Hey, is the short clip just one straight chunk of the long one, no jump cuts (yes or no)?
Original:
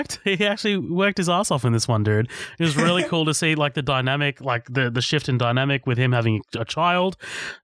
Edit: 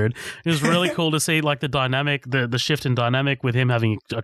no